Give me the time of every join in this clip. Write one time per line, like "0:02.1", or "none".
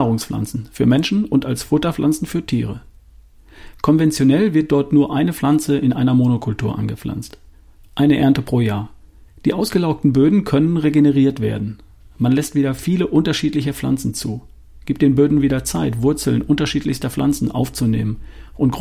0:09.3